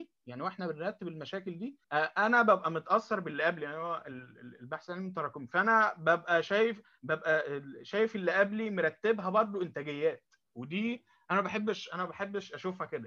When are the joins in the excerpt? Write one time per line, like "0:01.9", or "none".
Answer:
0:01.8